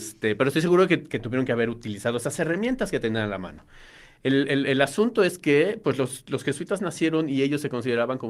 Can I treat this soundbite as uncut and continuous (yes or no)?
yes